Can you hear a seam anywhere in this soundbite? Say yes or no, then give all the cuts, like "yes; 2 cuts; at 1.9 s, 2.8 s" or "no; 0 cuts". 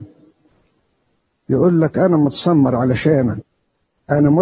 no; 0 cuts